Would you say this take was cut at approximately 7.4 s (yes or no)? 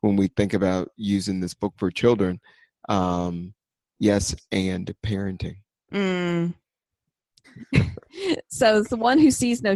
yes